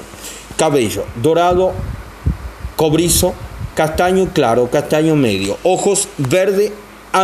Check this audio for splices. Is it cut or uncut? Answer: uncut